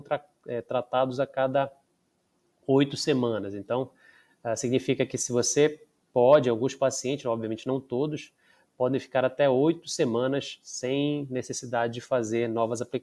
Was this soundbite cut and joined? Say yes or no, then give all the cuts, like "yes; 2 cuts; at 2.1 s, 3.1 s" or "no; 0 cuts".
no; 0 cuts